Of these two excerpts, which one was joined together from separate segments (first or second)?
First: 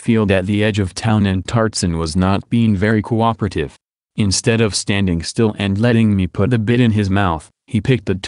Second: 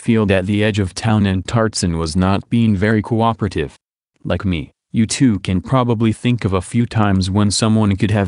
second